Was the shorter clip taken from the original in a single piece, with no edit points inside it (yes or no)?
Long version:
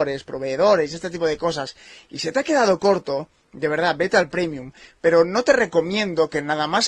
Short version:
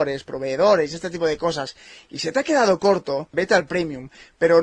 no